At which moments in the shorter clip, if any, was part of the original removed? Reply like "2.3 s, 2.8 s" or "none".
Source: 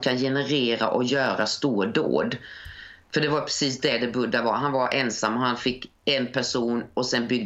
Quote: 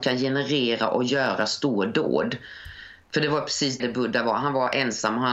3.8 s